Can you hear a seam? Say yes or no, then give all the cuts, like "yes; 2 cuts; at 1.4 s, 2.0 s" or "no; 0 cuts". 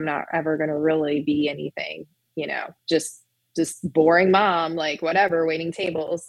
yes; 1 cut; at 2.8 s